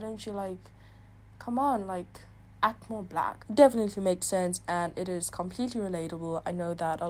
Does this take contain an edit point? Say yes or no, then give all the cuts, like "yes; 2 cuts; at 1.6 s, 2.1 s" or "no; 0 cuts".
yes; 1 cut; at 3.4 s